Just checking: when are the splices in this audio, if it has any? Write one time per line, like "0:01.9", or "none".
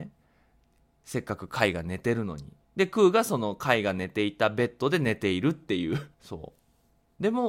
0:02.6
0:06.1